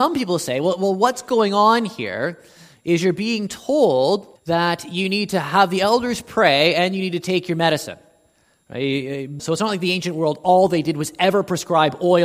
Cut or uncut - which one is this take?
cut